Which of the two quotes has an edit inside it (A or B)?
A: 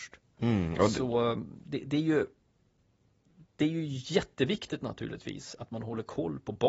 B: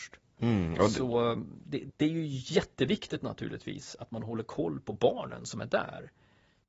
B